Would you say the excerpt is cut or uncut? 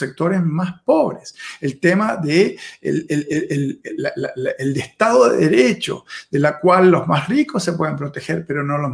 uncut